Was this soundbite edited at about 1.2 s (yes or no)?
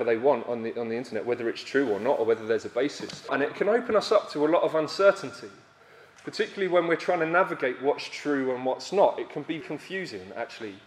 no